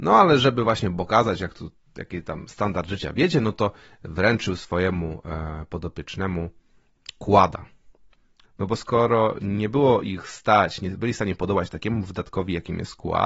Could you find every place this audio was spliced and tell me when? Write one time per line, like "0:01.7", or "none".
0:08.4

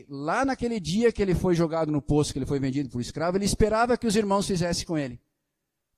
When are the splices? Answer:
none

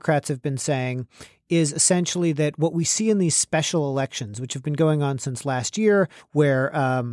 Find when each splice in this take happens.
0:06.2

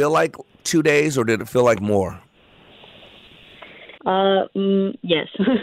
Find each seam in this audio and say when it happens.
0:04.0

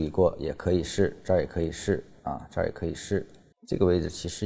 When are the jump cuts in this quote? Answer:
0:03.5

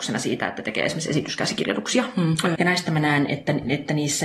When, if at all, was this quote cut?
0:02.6

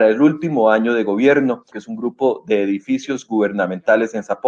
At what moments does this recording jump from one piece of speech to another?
0:01.7

